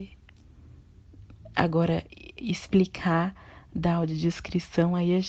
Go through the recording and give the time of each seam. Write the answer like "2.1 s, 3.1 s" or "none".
none